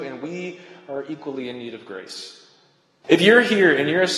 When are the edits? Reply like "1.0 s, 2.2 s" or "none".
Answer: 3.0 s